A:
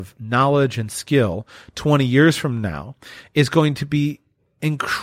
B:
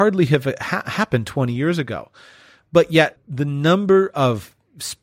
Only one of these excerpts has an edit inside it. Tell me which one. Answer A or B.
B